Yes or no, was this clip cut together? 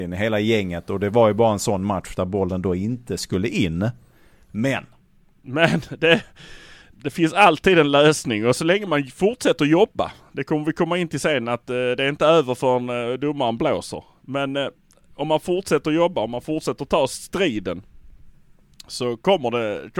yes